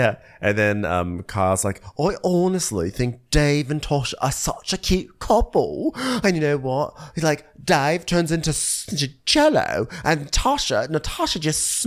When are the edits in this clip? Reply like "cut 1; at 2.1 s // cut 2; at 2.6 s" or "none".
none